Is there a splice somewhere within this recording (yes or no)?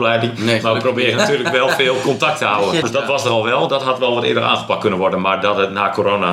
yes